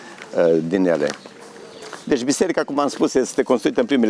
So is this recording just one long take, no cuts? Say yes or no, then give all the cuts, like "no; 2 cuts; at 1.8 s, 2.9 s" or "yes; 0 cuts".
yes; 0 cuts